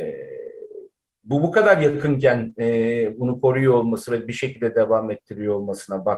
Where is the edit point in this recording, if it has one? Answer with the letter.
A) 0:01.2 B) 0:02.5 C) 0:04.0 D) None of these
D